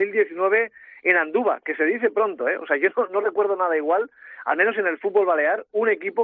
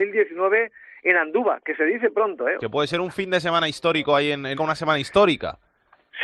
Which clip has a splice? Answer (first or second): second